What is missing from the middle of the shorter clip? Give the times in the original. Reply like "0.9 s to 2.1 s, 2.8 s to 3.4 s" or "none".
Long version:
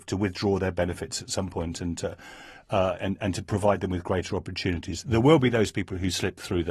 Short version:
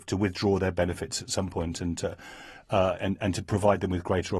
none